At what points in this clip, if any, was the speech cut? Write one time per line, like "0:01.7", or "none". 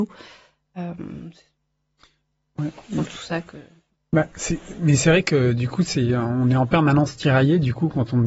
none